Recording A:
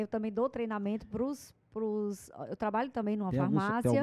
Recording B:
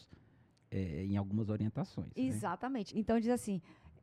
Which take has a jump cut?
B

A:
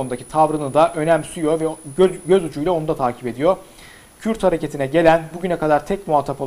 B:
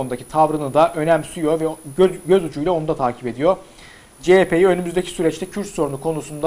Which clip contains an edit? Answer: B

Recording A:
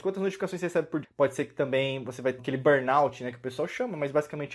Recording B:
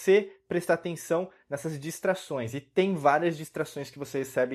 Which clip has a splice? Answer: A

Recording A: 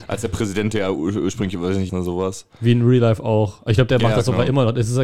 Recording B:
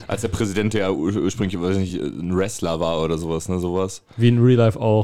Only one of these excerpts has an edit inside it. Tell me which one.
A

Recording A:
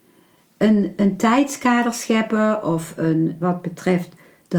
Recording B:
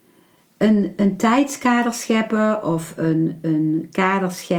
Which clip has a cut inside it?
A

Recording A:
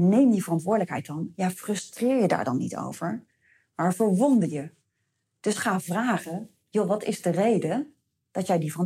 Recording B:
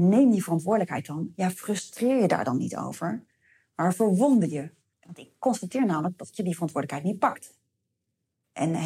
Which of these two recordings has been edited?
B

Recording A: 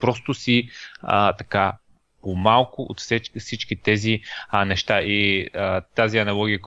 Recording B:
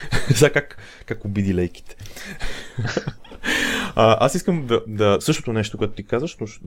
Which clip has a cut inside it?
B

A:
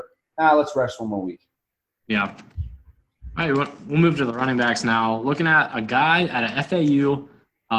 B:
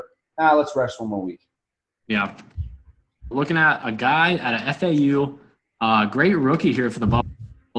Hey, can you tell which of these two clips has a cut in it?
B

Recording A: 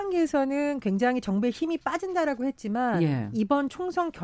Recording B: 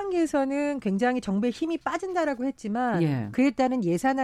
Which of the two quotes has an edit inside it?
B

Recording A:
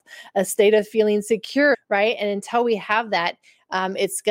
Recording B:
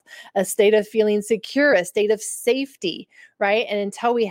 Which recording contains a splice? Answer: A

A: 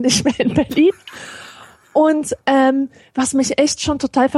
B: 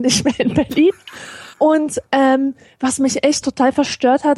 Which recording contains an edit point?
B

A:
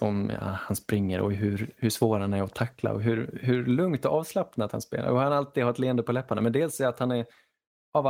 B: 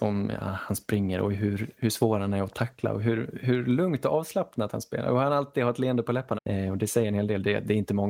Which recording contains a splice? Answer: B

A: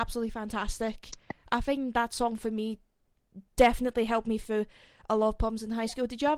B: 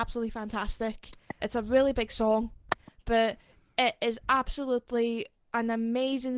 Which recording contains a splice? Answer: B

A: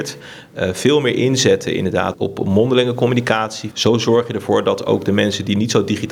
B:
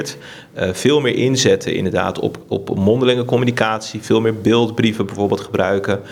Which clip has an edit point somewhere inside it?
A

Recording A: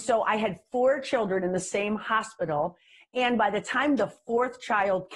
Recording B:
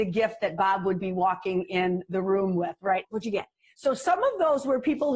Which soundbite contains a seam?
B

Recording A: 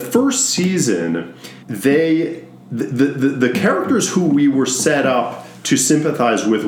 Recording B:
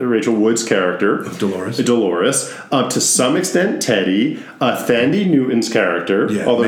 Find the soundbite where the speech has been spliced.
A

